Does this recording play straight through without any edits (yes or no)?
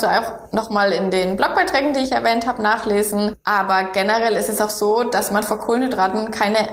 yes